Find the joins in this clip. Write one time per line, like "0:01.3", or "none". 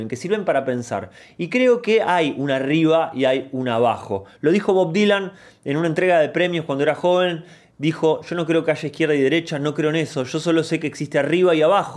none